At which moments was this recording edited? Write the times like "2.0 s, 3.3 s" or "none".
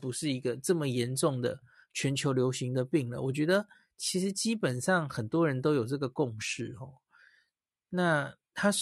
none